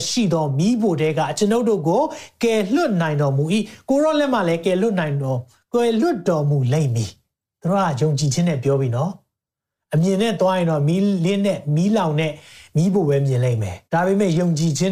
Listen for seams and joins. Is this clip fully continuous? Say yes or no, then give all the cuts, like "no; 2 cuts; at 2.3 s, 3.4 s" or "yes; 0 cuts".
no; 1 cut; at 13.9 s